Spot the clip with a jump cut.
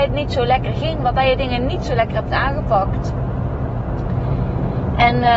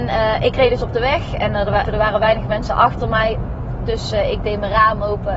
second; 1 cut; at 1.8 s

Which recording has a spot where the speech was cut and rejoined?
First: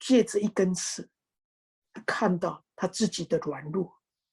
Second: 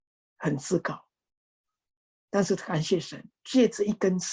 second; 1 cut; at 3.4 s

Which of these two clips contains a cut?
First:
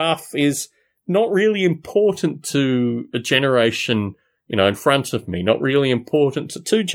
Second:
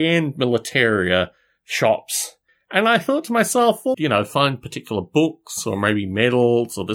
second; 1 cut; at 3.9 s

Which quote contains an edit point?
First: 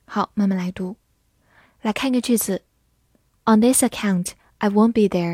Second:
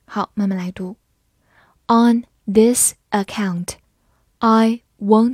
first; 1 cut; at 1.6 s

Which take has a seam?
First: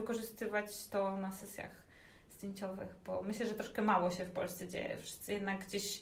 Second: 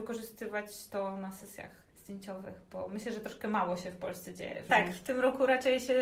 second; 2 cuts; at 1.9 s, 4.7 s

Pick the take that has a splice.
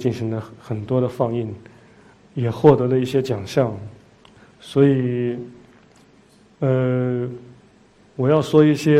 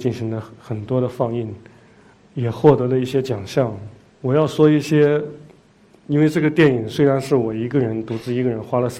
second; 1 cut; at 4.1 s

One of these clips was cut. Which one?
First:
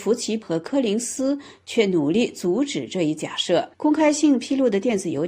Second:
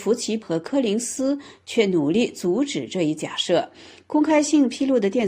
first; 1 cut; at 3.7 s

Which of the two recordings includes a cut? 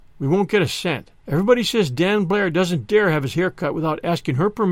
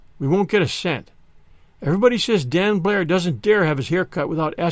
first; 1 cut; at 1.2 s

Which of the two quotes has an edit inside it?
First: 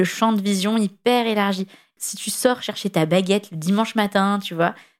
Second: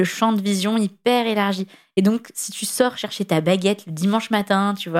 first; 1 cut; at 2.0 s

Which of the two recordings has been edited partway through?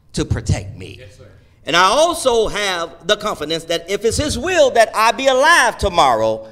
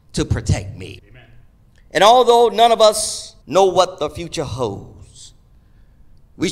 second; 2 cuts; at 1.0 s, 3.4 s

